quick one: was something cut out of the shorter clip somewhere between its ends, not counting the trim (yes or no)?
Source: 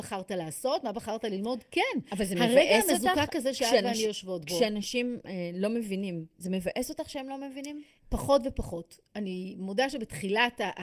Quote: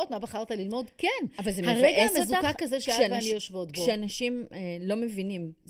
no